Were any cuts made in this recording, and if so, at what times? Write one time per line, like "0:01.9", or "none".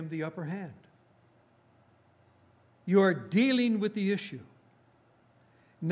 none